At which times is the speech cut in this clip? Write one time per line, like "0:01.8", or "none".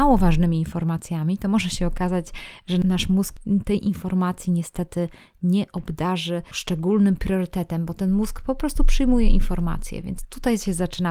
none

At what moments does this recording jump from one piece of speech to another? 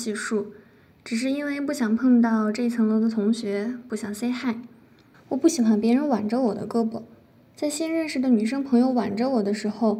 0:05.1

